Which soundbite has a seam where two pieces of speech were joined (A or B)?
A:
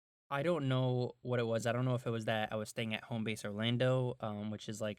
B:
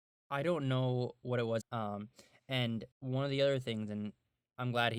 B